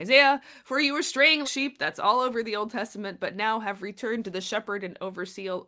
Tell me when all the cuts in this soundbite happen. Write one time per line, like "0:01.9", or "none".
0:01.4